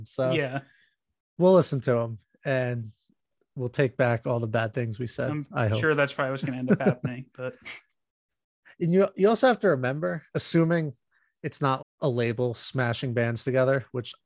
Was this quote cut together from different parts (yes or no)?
yes